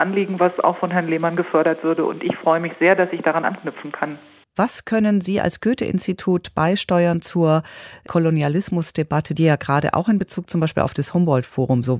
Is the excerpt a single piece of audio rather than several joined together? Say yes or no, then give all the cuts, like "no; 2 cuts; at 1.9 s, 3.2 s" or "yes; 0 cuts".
no; 1 cut; at 4.5 s